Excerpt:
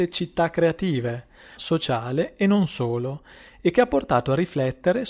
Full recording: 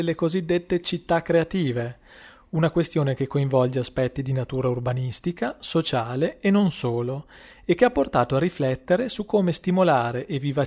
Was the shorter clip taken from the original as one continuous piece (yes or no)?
no